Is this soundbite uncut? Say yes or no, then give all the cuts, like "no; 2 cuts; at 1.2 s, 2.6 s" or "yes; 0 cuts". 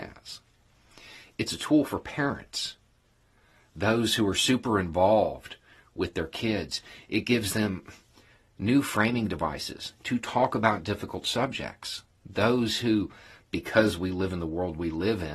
yes; 0 cuts